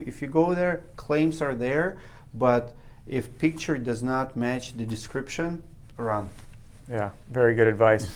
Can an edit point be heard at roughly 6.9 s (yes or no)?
no